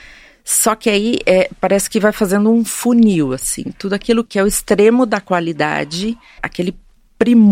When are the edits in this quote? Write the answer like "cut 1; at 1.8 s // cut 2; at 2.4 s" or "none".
cut 1; at 4.2 s // cut 2; at 6.4 s

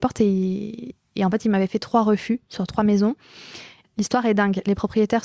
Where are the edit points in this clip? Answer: cut 1; at 3.8 s

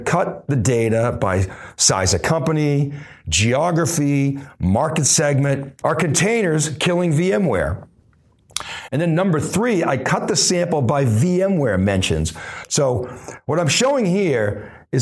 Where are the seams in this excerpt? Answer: cut 1; at 5.8 s // cut 2; at 8.9 s // cut 3; at 12.6 s

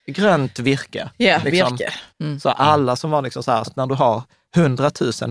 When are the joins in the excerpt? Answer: cut 1; at 2.1 s // cut 2; at 3.7 s

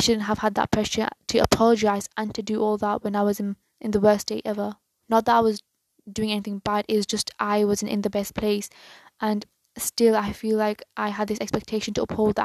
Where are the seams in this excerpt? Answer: cut 1; at 5.0 s

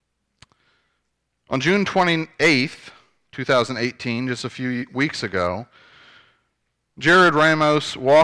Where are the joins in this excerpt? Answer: none

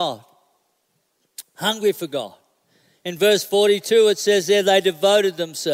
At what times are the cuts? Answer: none

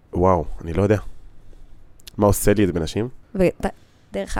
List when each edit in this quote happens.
cut 1; at 3.2 s

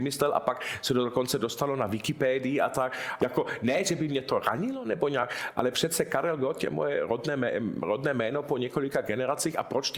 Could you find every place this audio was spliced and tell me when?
cut 1; at 3.2 s

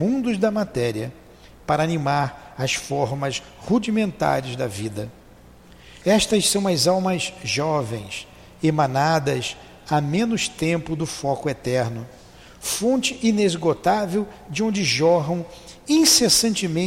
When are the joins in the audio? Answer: cut 1; at 6.0 s

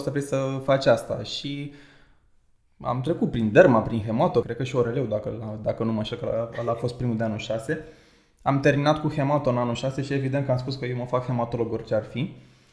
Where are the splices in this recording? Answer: cut 1; at 4.4 s

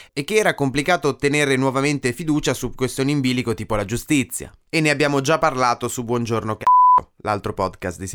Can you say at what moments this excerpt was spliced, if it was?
cut 1; at 4.7 s

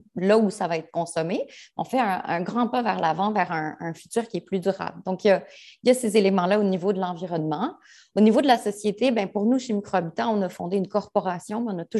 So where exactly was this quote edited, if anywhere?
none

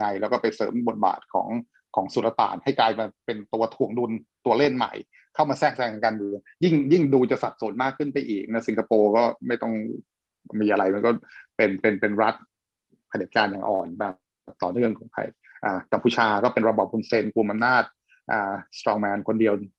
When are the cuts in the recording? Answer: none

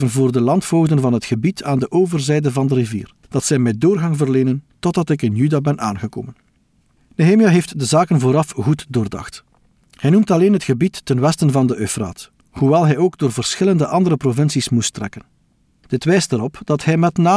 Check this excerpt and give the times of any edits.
none

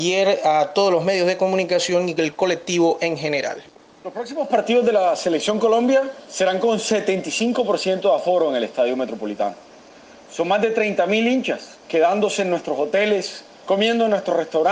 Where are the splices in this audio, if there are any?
cut 1; at 11.8 s

